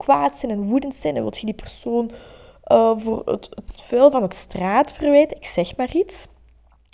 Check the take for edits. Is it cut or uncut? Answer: uncut